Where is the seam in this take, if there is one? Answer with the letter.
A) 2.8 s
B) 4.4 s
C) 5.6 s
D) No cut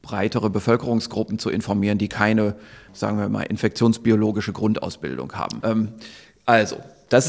C